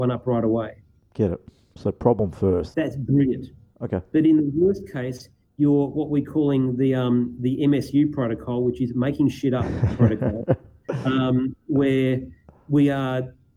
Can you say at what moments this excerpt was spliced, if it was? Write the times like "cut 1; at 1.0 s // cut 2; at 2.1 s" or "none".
cut 1; at 2.7 s

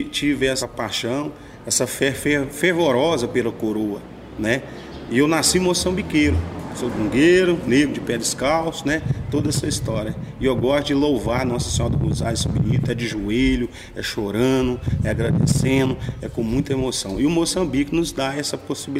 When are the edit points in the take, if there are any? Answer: none

